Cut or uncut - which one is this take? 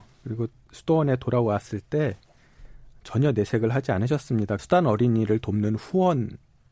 cut